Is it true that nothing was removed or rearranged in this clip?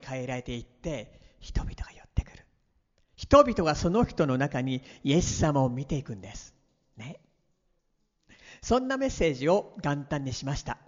yes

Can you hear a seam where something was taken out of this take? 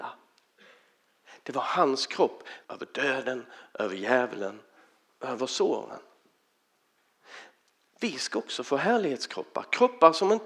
yes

